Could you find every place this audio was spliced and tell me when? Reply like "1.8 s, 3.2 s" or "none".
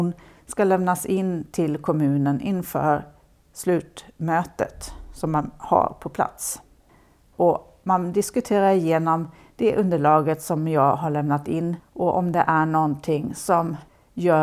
7.3 s